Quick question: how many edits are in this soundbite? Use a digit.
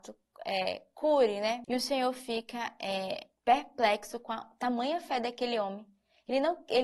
2